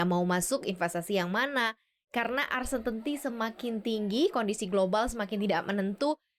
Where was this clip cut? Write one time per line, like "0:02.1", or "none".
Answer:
none